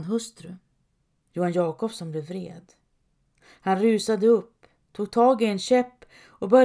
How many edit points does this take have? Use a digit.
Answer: 1